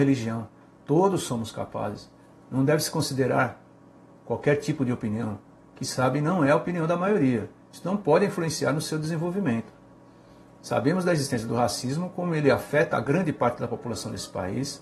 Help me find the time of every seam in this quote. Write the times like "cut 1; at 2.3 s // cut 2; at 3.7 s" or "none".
none

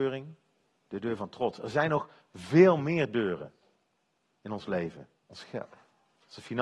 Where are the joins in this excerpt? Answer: cut 1; at 5.2 s

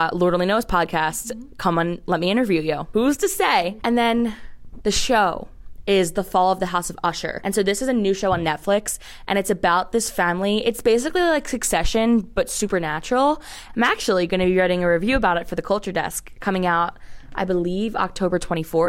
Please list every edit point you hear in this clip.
cut 1; at 13.7 s

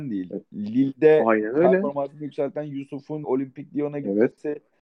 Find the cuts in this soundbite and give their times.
cut 1; at 3.2 s

